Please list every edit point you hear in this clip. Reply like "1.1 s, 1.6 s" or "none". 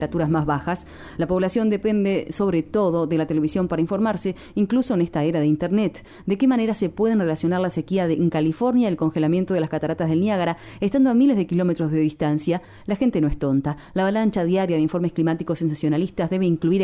none